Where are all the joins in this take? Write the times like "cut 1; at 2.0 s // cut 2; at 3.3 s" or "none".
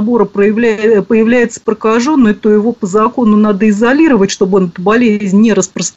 none